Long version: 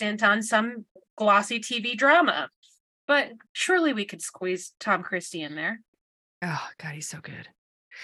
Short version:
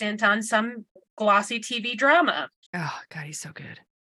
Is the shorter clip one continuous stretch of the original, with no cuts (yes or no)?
no